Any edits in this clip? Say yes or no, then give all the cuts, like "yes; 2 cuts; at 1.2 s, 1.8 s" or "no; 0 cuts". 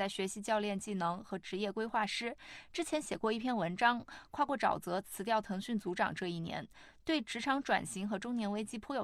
no; 0 cuts